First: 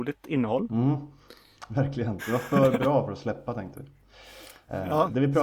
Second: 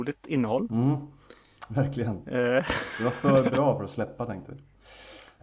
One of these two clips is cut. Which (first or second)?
first